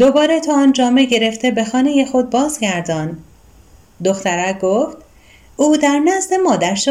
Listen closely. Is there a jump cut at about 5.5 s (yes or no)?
no